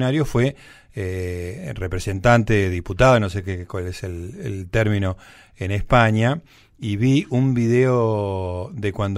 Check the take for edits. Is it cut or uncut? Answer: uncut